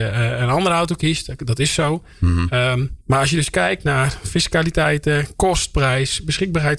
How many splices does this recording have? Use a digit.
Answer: 1